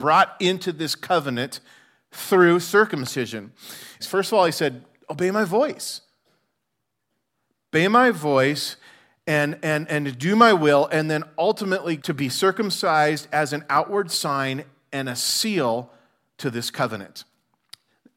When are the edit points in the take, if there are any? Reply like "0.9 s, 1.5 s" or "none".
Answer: 4.0 s, 12.0 s